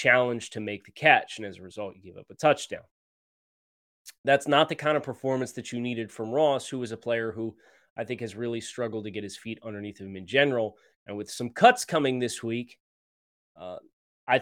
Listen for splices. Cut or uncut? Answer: uncut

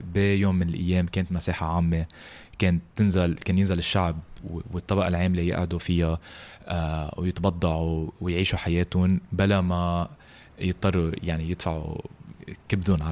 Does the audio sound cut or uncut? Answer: cut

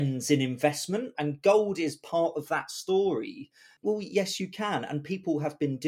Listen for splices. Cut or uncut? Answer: cut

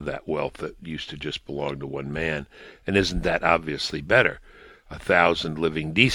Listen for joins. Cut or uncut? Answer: uncut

